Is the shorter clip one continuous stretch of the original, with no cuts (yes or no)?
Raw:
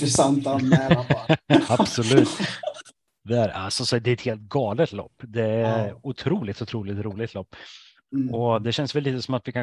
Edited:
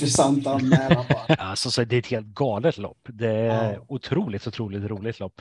no